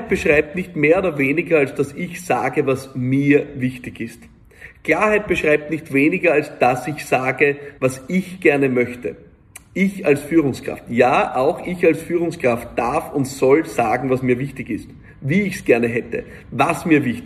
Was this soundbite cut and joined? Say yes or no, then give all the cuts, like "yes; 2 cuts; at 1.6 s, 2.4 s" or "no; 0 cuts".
yes; 1 cut; at 7.8 s